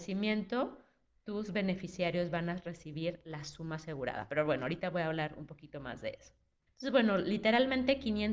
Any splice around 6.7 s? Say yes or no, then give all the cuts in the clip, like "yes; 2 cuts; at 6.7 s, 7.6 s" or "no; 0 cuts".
yes; 1 cut; at 6.7 s